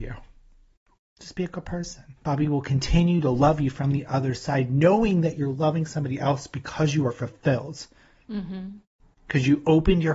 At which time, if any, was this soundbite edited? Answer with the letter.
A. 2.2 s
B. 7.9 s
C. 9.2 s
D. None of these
A